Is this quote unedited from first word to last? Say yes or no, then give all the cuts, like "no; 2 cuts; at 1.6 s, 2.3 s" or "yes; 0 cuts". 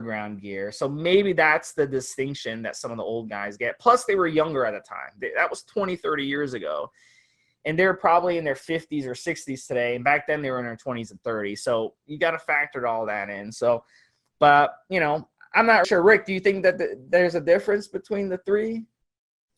no; 1 cut; at 15.8 s